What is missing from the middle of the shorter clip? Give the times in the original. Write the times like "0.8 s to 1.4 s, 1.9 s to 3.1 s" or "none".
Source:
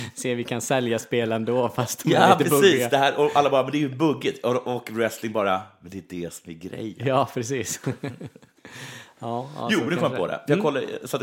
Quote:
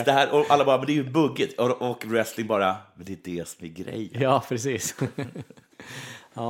none